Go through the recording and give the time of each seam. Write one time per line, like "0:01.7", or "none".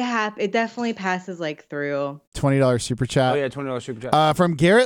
0:02.3

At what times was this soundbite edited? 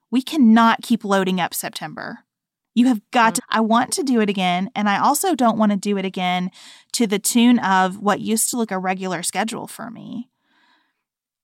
0:03.4
0:08.7

